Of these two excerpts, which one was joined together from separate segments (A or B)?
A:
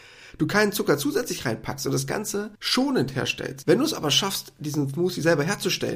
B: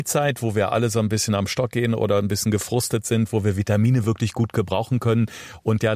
A